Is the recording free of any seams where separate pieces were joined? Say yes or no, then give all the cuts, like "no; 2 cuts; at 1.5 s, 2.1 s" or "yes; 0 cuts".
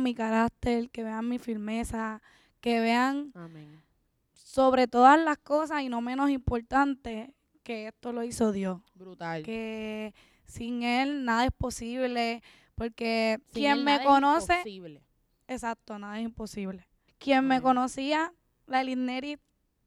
no; 2 cuts; at 13.4 s, 17.1 s